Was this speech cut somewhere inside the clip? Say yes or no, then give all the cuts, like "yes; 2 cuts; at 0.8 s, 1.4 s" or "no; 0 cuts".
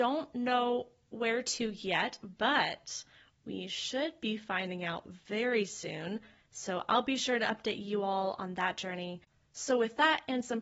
no; 0 cuts